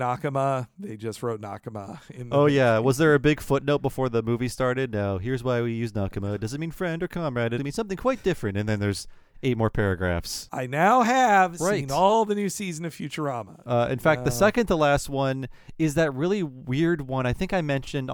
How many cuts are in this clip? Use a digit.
3